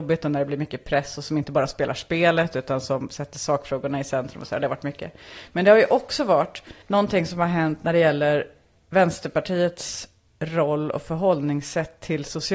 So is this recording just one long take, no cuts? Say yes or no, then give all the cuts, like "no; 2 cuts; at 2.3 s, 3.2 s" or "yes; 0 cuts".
no; 1 cut; at 6.8 s